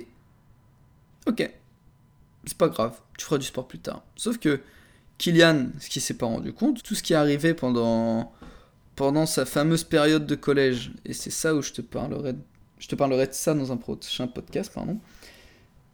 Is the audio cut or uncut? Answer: cut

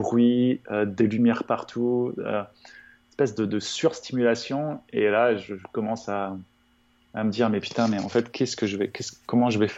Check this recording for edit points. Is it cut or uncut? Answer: uncut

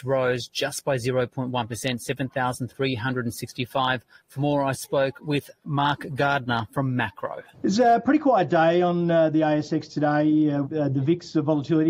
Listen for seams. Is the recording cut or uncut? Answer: cut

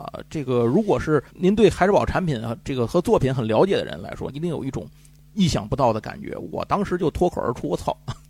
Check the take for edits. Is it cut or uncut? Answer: cut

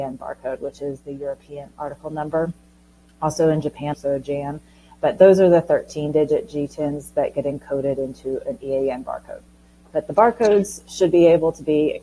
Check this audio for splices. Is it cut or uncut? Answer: cut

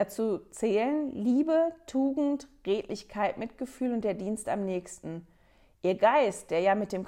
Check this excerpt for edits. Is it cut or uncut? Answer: uncut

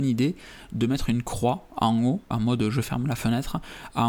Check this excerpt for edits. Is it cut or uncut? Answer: cut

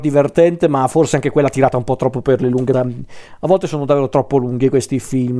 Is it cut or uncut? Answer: cut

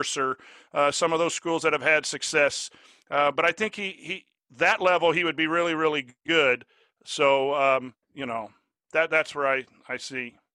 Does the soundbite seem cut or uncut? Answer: cut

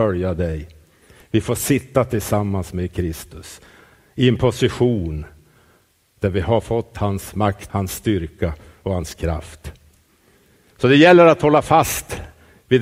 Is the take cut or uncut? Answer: cut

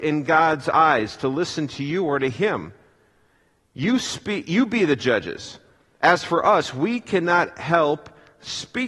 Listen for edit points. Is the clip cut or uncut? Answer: uncut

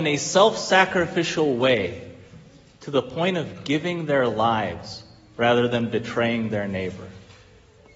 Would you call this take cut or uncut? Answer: uncut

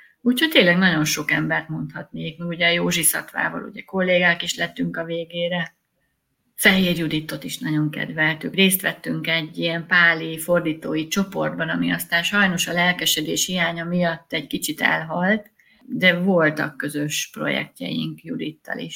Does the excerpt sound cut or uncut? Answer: uncut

